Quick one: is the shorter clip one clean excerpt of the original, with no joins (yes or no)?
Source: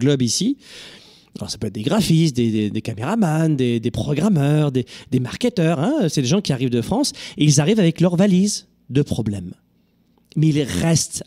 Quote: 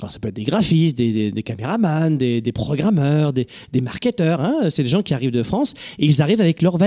yes